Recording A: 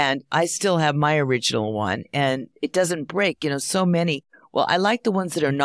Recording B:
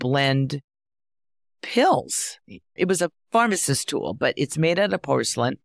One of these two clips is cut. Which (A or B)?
B